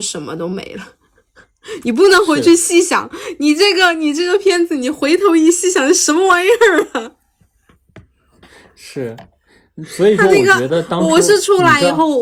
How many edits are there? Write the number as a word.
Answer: zero